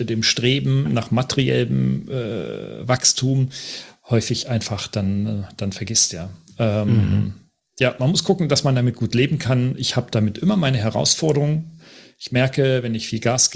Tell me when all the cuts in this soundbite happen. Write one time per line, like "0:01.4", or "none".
none